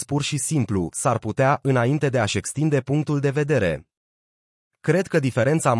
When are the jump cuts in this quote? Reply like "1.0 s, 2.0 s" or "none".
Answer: none